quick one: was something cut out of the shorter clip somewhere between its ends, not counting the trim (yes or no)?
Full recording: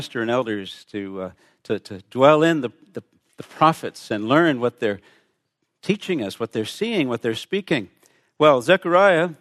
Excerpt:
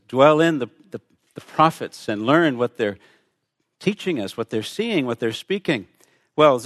no